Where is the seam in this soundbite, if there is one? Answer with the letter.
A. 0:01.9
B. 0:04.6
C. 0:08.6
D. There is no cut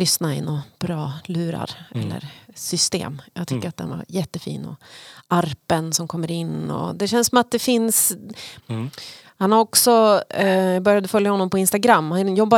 C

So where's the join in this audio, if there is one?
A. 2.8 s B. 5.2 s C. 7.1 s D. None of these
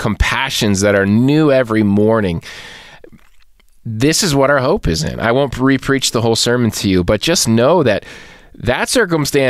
D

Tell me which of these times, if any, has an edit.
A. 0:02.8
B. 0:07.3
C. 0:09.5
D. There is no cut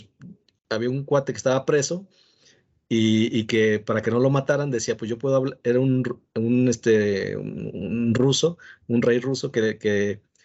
D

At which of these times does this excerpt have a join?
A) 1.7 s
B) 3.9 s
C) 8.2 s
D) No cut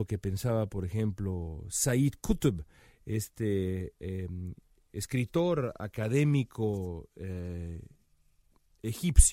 D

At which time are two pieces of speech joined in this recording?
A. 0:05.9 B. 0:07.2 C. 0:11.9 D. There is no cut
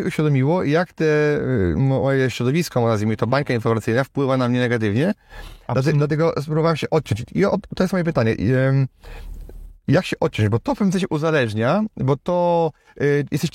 D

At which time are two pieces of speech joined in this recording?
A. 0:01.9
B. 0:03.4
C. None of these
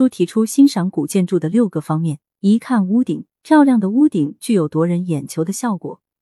B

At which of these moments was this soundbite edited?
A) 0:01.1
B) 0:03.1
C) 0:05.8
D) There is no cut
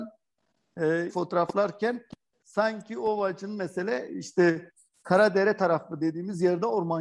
A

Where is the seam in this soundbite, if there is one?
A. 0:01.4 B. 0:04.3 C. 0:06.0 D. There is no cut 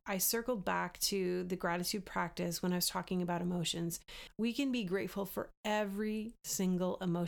B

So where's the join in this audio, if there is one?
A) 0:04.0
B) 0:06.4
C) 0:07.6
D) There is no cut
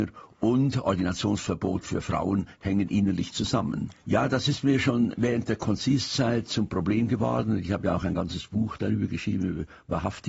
A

